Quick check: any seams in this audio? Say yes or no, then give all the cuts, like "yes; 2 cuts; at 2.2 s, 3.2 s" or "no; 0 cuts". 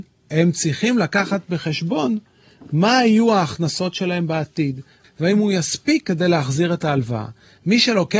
yes; 1 cut; at 5.0 s